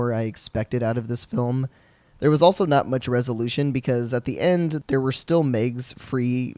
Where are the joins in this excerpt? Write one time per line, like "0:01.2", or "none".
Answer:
0:02.1